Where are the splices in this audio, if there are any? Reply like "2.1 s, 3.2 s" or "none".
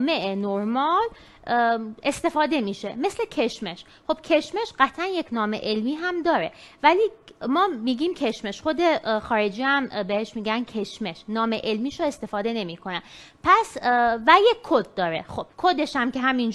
15.5 s